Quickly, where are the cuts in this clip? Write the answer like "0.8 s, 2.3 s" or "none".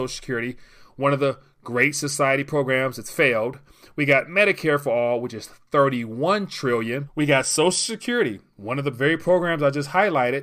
7.0 s